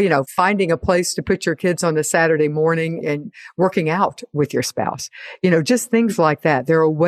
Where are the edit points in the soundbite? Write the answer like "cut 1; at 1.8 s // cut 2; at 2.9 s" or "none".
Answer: cut 1; at 3.0 s